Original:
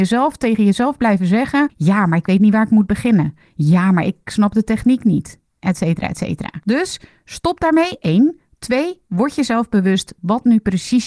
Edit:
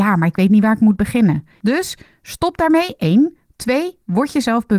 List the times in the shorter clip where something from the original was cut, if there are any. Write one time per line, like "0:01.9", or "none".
0:01.6